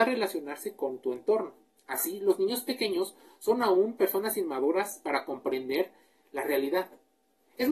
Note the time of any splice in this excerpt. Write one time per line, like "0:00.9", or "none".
none